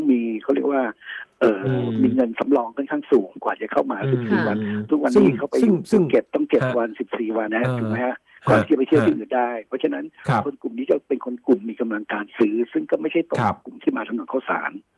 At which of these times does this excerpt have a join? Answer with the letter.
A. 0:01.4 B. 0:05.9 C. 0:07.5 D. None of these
C